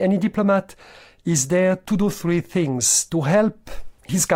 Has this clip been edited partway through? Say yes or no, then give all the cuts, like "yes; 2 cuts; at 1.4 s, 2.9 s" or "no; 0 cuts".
no; 0 cuts